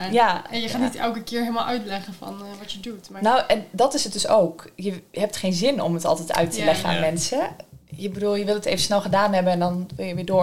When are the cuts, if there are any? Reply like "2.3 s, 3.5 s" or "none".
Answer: none